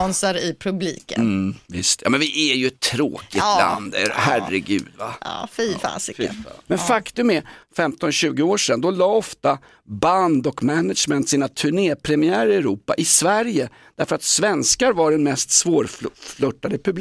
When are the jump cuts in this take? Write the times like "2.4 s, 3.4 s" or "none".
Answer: 7.6 s